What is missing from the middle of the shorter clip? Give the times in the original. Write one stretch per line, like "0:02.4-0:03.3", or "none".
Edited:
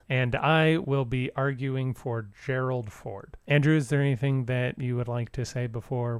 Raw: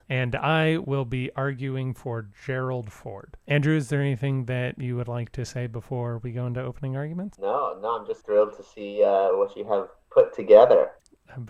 none